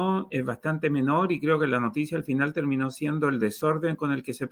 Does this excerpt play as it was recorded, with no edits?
yes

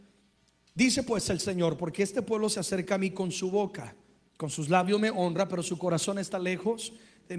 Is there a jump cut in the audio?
no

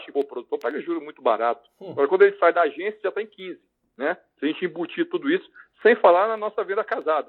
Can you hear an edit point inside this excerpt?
no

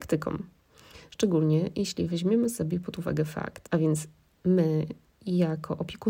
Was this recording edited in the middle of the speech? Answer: yes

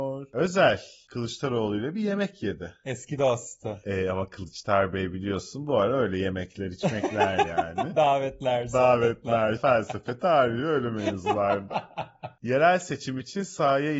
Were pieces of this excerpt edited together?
yes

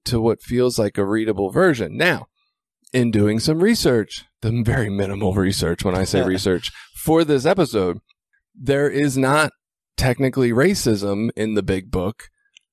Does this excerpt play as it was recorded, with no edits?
yes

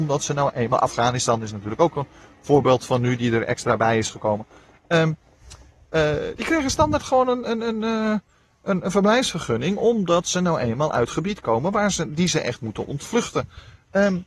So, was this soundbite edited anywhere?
no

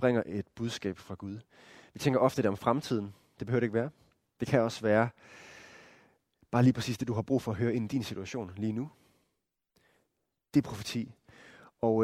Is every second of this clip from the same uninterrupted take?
yes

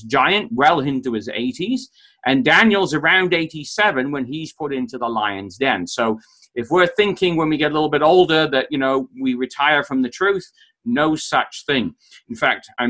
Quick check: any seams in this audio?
no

